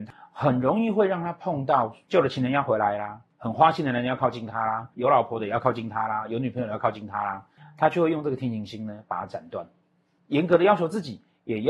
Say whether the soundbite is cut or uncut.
uncut